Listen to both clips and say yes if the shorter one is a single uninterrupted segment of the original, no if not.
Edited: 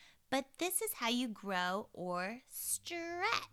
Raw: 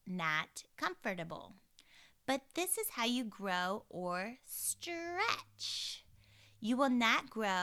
yes